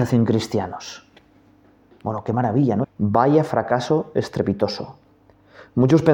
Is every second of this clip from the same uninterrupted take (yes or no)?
no